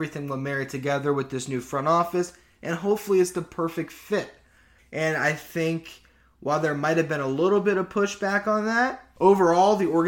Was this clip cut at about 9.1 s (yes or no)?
no